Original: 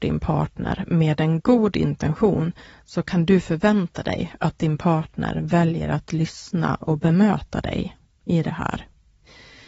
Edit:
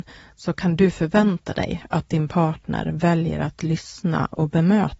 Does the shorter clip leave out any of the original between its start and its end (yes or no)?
no